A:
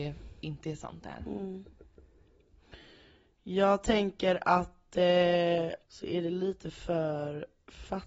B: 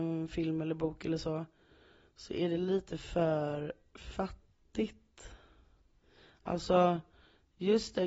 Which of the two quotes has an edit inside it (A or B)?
A